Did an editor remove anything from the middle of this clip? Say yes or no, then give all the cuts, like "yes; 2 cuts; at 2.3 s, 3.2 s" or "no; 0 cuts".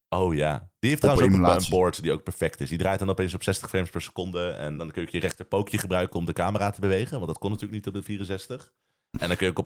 yes; 1 cut; at 4.8 s